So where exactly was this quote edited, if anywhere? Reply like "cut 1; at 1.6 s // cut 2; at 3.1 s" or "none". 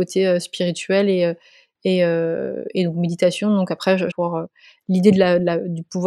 cut 1; at 4.1 s